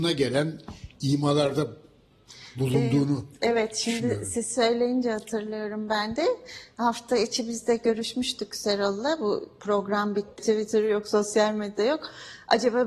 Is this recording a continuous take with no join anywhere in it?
no; 1 cut; at 10.4 s

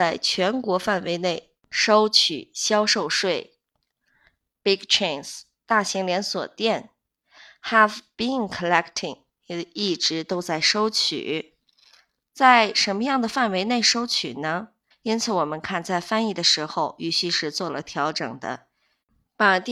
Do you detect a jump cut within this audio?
yes; 1 cut; at 14.9 s

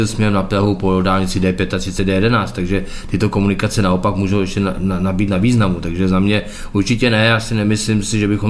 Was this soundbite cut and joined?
no; 0 cuts

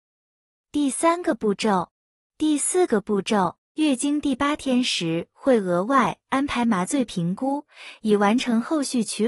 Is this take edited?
yes; 2 cuts; at 2.3 s, 3.6 s

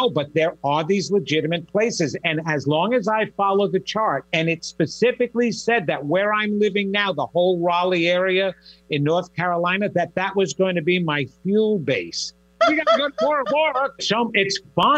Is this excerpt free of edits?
no; 2 cuts; at 12.6 s, 14.0 s

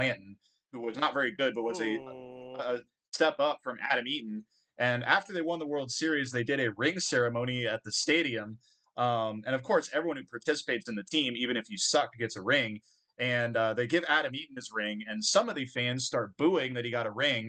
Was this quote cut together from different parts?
no; 0 cuts

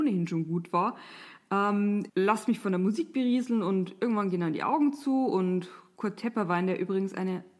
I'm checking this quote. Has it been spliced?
yes; 1 cut; at 2.1 s

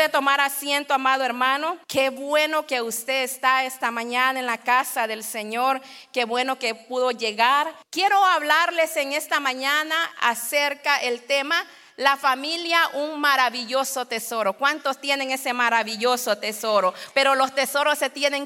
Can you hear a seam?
yes; 3 cuts; at 1.8 s, 7.8 s, 17.1 s

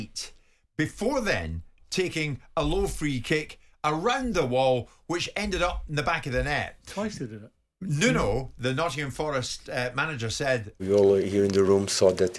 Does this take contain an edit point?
yes; 1 cut; at 10.8 s

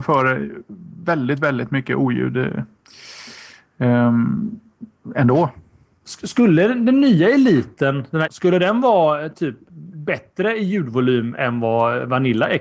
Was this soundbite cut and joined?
yes; 1 cut; at 8.3 s

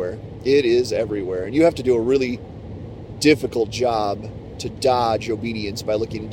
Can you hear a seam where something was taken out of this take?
no; 0 cuts

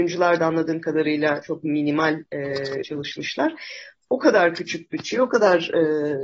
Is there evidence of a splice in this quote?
yes; 1 cut; at 2.8 s

